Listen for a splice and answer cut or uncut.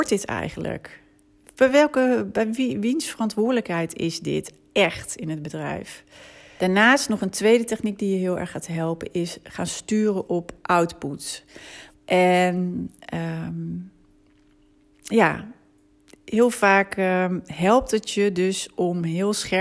cut